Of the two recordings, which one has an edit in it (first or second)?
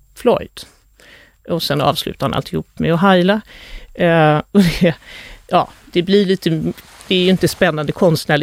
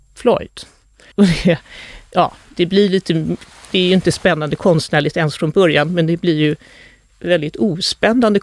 second